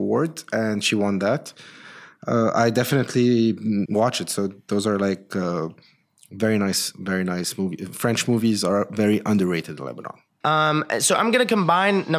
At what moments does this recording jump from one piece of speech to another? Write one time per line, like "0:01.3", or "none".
0:03.9
0:10.4